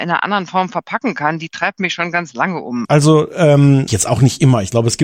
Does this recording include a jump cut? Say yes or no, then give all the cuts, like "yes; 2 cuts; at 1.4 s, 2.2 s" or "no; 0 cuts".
yes; 2 cuts; at 2.8 s, 3.9 s